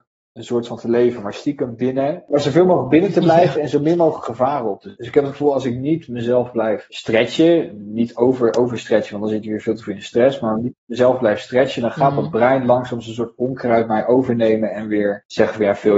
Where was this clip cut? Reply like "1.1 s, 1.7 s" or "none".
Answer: 5.5 s